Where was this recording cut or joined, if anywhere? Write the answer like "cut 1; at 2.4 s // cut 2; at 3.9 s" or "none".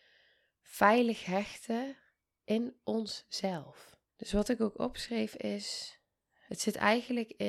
cut 1; at 4.1 s // cut 2; at 6.5 s